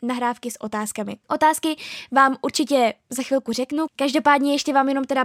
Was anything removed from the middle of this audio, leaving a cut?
yes; 1 cut; at 1.2 s

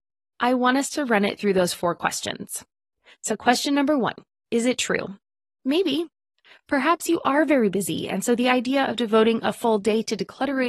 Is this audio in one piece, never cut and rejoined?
yes; 0 cuts

